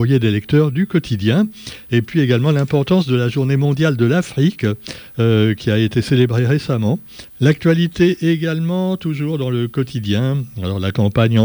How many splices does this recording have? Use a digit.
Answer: 1